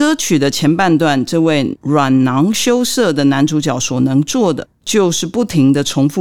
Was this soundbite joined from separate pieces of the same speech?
no; 0 cuts

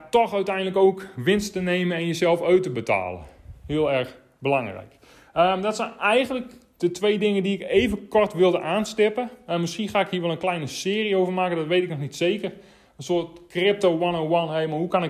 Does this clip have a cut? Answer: no; 0 cuts

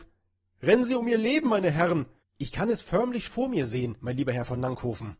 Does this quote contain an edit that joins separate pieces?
yes; 2 cuts; at 2.2 s, 3.3 s

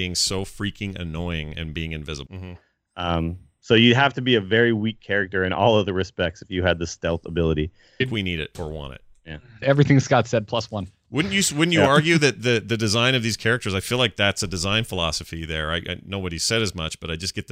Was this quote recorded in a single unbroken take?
no; 3 cuts; at 2.3 s, 8.0 s, 9.6 s

